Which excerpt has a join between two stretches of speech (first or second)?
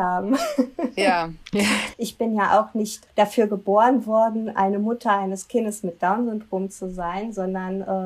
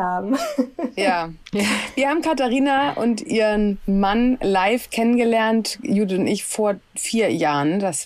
first